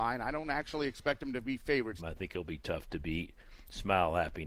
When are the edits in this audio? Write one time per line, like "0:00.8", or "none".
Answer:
0:02.0

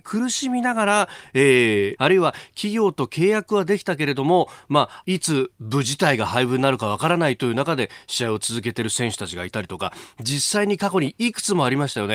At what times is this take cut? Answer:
0:02.0
0:05.0

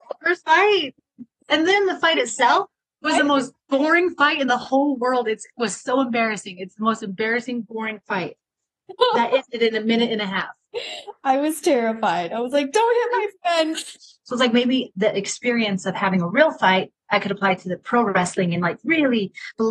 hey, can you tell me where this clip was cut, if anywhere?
0:13.9

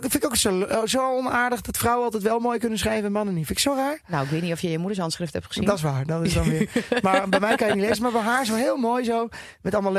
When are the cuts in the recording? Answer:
none

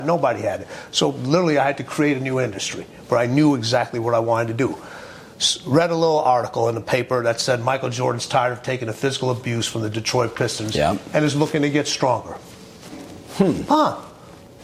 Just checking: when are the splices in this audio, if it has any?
none

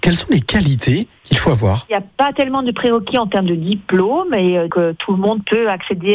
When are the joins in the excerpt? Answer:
0:04.7

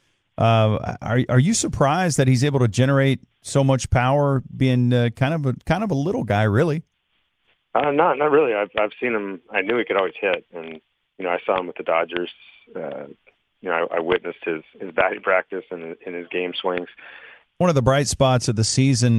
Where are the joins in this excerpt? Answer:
0:17.5

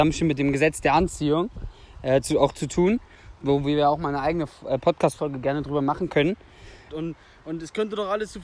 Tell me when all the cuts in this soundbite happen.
0:06.9

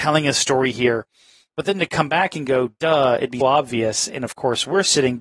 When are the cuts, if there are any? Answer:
0:03.4

